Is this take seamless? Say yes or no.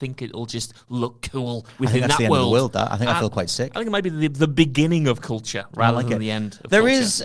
yes